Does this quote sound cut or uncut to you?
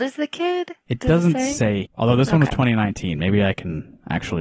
cut